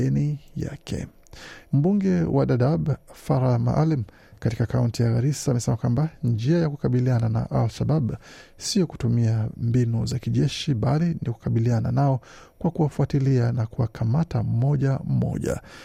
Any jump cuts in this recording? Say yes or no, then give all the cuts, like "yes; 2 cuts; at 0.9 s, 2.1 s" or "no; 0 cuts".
yes; 1 cut; at 1.6 s